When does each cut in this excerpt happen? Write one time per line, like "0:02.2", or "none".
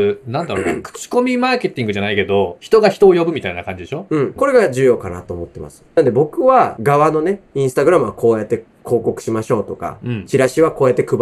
0:04.4